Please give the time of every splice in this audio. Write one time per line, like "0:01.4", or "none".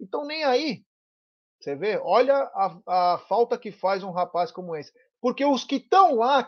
0:01.4
0:05.1